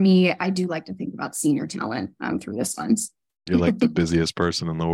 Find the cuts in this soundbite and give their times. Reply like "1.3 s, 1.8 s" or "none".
3.5 s